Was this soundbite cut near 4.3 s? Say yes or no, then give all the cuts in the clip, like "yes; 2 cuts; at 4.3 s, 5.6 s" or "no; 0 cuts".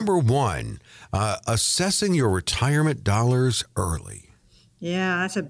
no; 0 cuts